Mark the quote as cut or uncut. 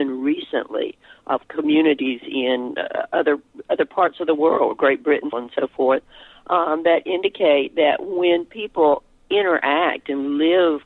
cut